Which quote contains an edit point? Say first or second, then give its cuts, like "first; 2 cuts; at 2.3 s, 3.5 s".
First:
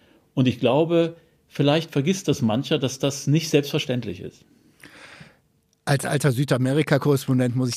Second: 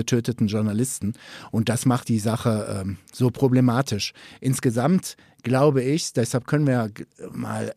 second; 1 cut; at 2.0 s